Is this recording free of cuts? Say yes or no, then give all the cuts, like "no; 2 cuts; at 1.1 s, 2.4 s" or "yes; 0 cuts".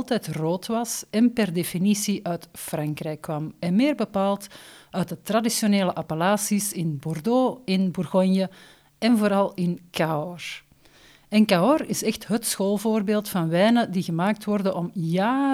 yes; 0 cuts